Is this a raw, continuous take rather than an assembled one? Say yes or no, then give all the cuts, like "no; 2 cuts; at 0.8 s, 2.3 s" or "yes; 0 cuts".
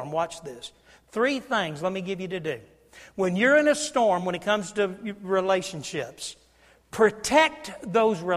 yes; 0 cuts